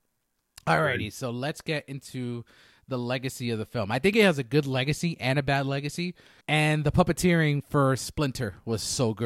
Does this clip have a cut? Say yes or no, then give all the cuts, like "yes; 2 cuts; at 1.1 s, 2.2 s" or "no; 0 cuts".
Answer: yes; 1 cut; at 6.4 s